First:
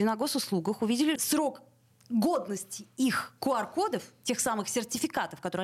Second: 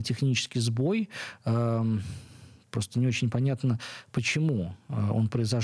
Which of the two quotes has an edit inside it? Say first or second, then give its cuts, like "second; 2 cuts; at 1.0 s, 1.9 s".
first; 1 cut; at 1.2 s